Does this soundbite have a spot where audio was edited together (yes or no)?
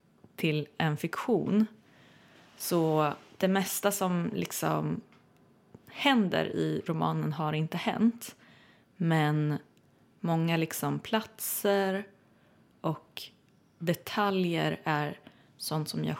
no